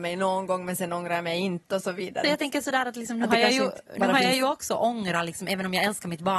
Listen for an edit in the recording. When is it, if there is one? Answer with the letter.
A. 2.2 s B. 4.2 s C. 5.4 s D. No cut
A